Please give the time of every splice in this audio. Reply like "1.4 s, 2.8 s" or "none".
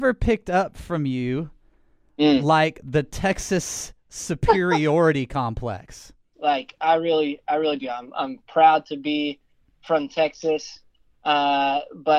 6.3 s